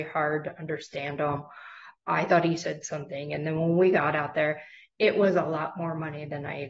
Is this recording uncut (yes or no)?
yes